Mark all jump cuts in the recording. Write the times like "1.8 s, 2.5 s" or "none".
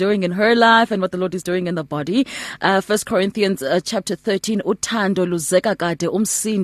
none